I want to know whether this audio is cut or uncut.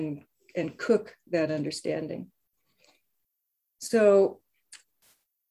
uncut